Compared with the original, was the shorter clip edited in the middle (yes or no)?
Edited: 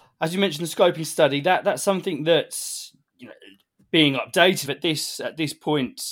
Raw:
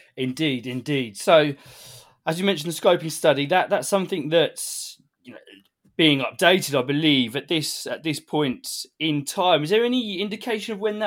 yes